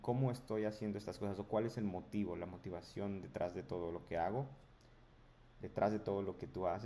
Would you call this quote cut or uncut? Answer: uncut